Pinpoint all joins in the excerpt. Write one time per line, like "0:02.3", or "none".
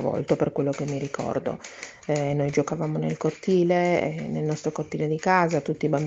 none

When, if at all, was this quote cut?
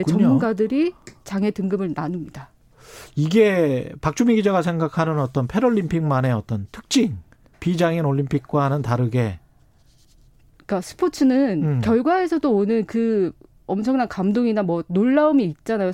0:07.5

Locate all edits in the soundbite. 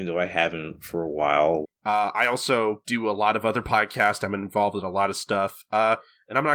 0:01.6

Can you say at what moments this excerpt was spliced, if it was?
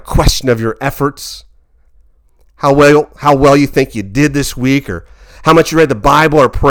none

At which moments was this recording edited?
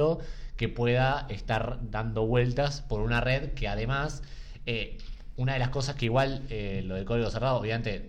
none

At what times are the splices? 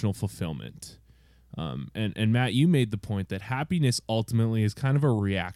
none

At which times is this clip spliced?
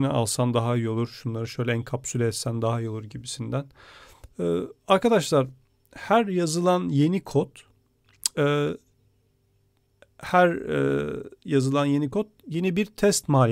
0:04.3

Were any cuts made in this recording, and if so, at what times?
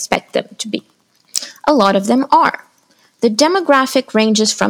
none

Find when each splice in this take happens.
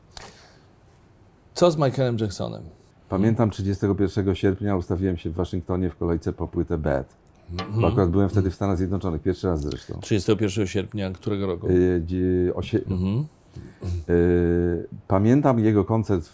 0:02.9
0:12.9

